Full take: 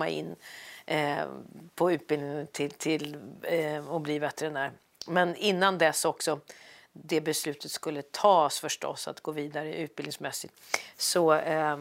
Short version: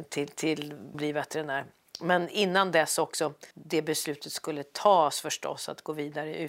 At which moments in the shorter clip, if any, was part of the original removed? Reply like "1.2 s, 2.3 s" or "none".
0.9 s, 3.5 s